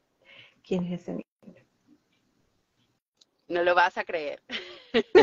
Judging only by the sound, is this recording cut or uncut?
uncut